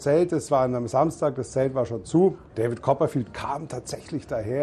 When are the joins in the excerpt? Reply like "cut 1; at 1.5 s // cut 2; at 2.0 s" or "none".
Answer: none